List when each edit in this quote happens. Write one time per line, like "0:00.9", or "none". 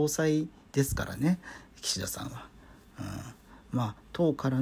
none